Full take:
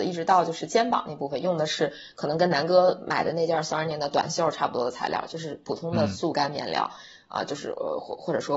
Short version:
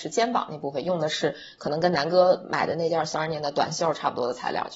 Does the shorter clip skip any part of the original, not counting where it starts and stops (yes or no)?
no